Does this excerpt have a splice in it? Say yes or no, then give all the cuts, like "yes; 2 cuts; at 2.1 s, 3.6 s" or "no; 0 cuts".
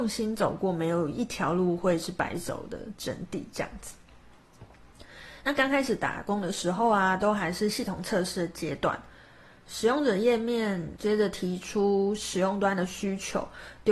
yes; 1 cut; at 11.0 s